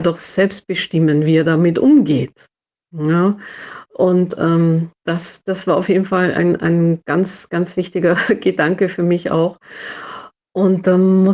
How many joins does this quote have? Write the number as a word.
two